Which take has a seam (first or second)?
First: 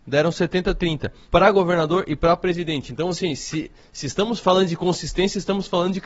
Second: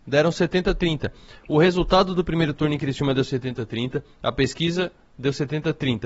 first